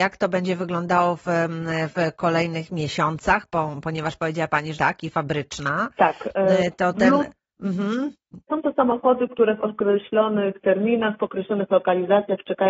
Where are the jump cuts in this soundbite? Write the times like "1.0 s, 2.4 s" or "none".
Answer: 4.7 s, 8.5 s